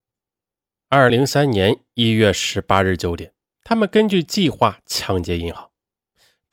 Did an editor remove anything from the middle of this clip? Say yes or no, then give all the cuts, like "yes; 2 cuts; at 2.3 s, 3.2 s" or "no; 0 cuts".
yes; 1 cut; at 1.1 s